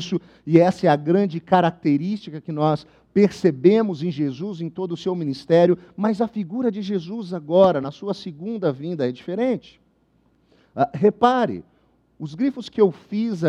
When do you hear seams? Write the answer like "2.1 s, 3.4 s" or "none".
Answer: none

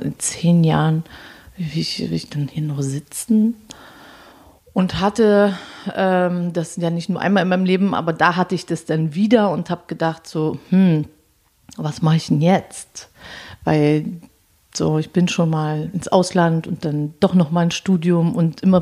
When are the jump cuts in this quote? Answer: none

